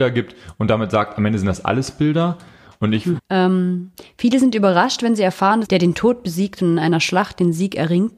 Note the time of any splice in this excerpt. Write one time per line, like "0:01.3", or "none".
0:03.2
0:05.6